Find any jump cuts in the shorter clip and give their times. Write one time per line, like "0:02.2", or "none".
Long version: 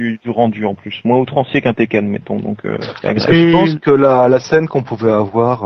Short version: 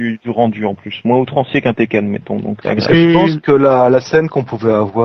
0:02.6